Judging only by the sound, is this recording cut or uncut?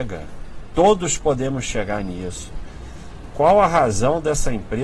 uncut